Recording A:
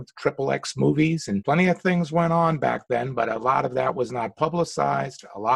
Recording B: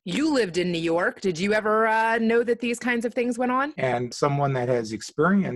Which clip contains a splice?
B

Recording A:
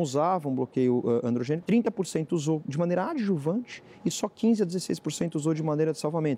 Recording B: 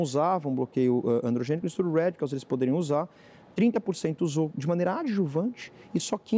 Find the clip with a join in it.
A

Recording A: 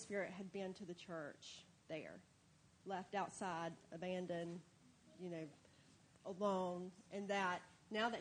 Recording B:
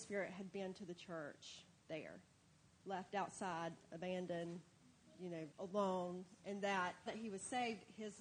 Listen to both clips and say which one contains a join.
B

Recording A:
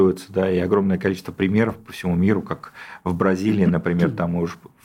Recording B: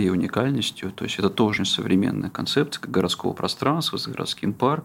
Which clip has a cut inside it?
B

